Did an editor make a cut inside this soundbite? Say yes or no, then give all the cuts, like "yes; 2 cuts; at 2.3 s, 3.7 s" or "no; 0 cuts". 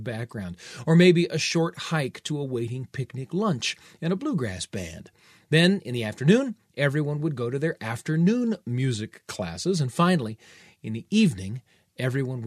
no; 0 cuts